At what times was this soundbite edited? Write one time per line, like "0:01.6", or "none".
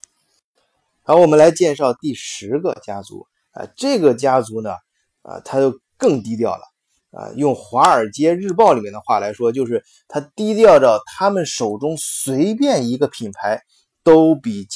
0:07.0